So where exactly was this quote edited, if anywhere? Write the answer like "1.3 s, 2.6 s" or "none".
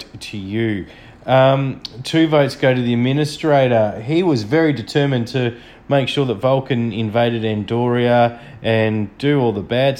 none